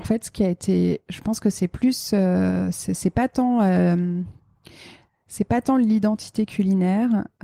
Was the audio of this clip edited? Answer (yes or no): no